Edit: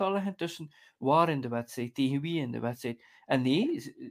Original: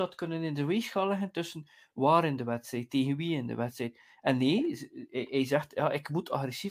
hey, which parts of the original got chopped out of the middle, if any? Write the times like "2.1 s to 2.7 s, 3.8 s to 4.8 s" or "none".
none